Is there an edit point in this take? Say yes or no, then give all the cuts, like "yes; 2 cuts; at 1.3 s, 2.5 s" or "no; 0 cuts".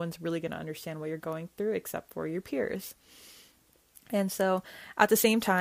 no; 0 cuts